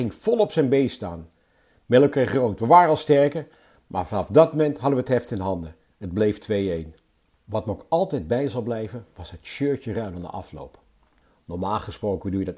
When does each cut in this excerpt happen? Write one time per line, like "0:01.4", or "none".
none